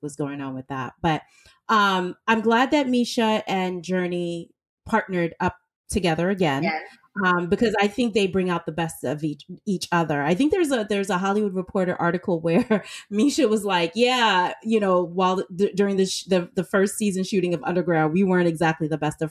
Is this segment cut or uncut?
uncut